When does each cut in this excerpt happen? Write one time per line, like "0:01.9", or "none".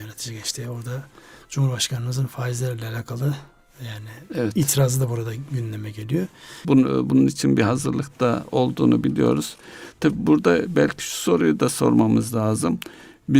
0:06.6